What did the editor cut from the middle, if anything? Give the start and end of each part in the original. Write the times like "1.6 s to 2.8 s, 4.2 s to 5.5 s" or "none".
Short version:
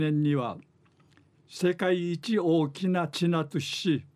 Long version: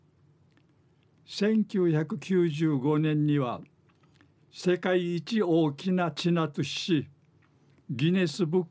none